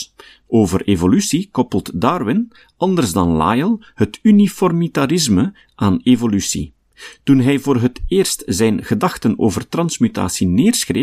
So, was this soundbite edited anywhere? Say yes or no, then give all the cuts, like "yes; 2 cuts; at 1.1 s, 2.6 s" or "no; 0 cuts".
no; 0 cuts